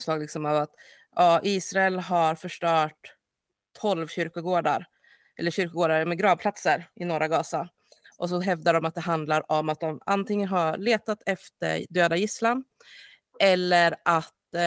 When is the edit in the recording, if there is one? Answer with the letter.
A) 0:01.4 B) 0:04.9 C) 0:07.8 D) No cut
D